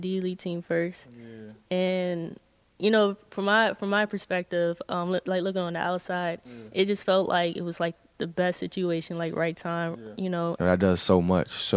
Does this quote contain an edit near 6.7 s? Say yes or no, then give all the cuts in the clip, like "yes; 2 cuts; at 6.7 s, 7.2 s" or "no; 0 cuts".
no; 1 cut; at 10.6 s